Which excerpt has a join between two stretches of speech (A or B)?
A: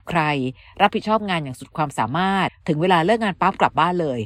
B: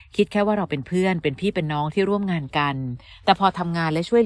A